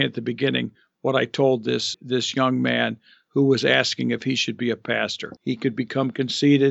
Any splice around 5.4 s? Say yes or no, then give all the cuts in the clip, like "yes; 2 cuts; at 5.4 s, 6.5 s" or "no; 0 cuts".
yes; 2 cuts; at 1.9 s, 5.4 s